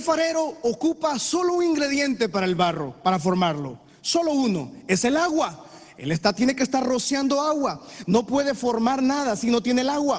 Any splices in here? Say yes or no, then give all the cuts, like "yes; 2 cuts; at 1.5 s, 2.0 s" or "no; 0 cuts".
no; 0 cuts